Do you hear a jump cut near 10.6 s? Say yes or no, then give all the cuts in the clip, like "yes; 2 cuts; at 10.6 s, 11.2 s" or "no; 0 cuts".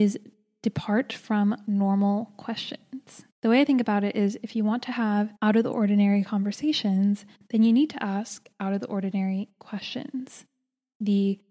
no; 2 cuts; at 3.3 s, 5.4 s